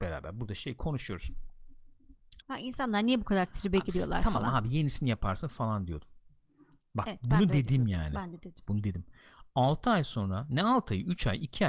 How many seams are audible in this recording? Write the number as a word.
one